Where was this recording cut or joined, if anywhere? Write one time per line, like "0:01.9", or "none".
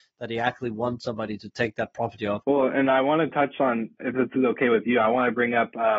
0:02.4
0:04.0